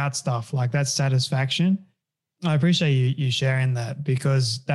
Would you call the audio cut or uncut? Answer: cut